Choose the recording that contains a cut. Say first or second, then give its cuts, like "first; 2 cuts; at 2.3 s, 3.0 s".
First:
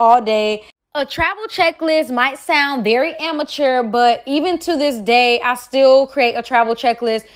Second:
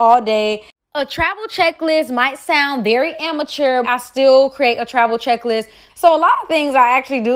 second; 2 cuts; at 3.8 s, 5.9 s